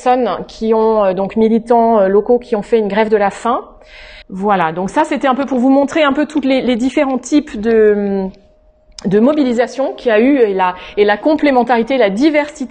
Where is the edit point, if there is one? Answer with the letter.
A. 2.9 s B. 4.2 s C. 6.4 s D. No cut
B